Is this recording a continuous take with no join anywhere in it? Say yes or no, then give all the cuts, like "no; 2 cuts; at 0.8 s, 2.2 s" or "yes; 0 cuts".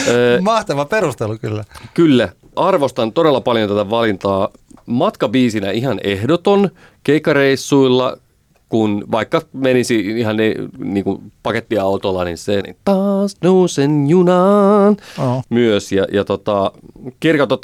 no; 2 cuts; at 12.6 s, 15.4 s